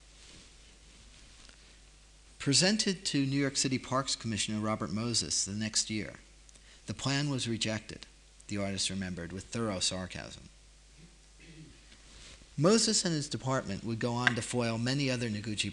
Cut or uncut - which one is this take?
uncut